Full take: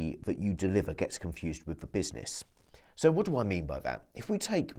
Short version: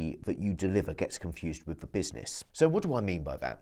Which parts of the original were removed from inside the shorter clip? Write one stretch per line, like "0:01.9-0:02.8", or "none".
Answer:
0:02.5-0:02.9